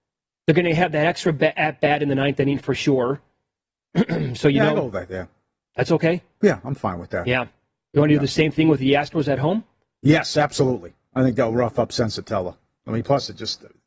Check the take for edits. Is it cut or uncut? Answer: uncut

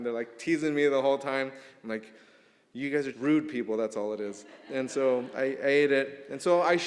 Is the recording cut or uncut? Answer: cut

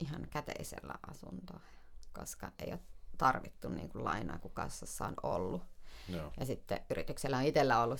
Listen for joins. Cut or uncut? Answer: uncut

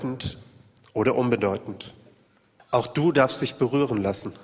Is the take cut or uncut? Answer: cut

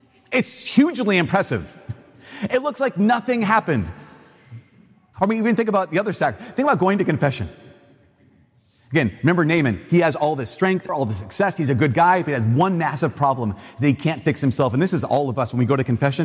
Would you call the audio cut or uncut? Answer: cut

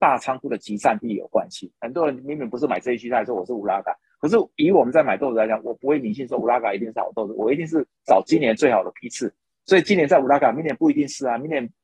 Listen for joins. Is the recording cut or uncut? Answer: cut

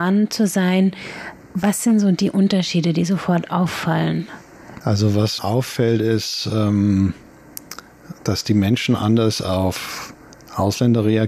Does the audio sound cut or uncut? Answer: cut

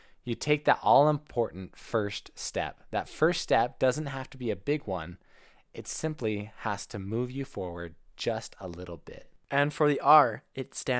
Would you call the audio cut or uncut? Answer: uncut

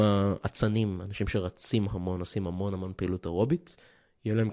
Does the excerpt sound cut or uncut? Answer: uncut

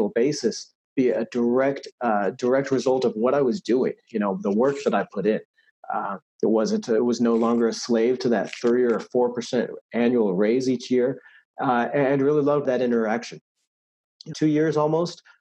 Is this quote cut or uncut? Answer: cut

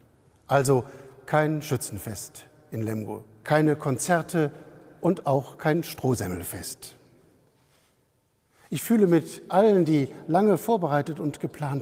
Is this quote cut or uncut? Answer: cut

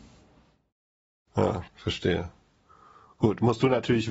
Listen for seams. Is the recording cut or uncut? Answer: cut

